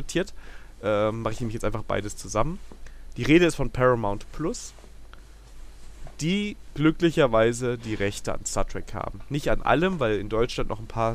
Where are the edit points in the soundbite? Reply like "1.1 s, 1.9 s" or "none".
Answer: none